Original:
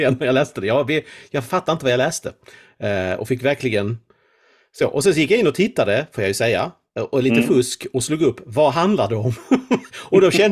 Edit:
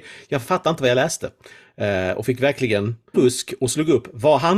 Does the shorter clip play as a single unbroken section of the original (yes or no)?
no